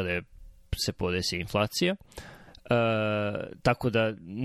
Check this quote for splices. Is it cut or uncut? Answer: uncut